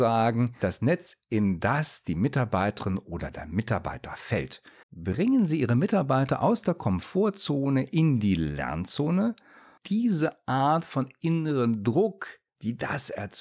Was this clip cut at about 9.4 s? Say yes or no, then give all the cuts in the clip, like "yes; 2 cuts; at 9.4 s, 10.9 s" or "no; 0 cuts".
no; 1 cut; at 4.8 s